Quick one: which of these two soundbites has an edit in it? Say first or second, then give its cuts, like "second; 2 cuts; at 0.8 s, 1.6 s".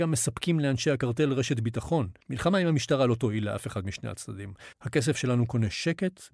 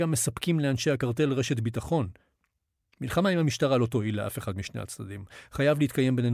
first; 2 cuts; at 2.2 s, 4.7 s